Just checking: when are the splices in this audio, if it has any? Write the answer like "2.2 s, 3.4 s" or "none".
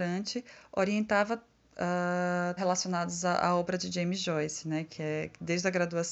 2.6 s